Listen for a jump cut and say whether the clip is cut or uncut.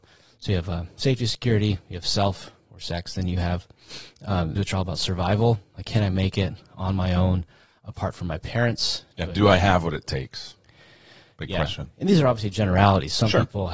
cut